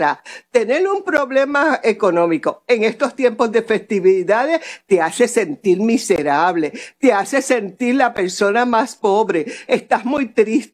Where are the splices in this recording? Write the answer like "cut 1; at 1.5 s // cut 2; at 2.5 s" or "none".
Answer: none